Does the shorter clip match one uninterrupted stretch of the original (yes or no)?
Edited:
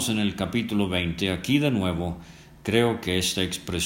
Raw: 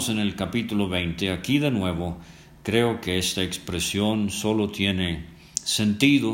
yes